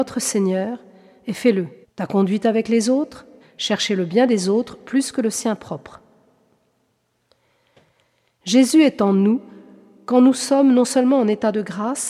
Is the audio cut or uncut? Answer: cut